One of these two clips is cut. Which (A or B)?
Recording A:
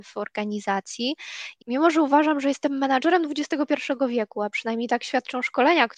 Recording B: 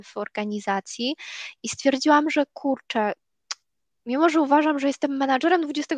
A